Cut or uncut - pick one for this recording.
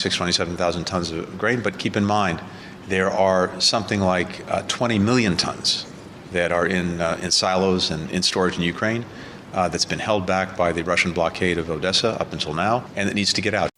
uncut